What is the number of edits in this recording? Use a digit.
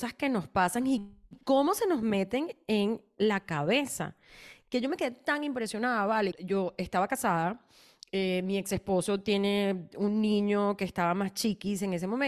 1